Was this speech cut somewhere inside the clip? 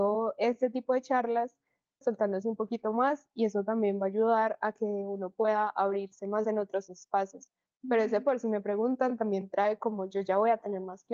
yes; 2 cuts; at 2.0 s, 7.7 s

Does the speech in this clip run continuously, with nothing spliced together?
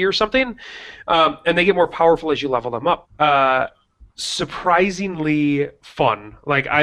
no; 1 cut; at 3.0 s

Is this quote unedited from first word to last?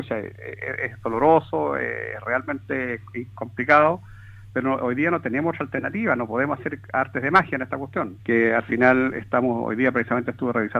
no; 1 cut; at 8.2 s

